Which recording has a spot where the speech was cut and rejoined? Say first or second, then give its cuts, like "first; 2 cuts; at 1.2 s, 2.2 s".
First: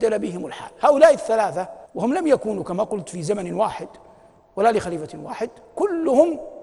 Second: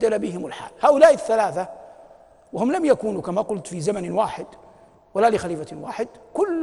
first; 1 cut; at 1.8 s